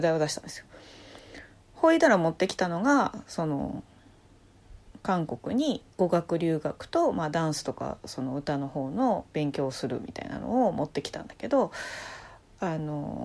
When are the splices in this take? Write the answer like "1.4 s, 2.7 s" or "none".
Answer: none